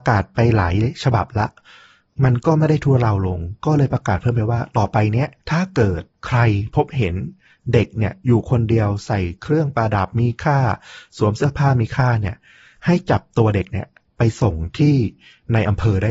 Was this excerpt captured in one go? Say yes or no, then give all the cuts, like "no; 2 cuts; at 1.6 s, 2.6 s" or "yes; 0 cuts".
no; 1 cut; at 5.4 s